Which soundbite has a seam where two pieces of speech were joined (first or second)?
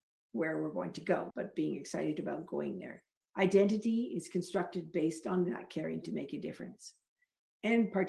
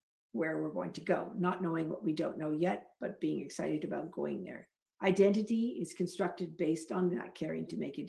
first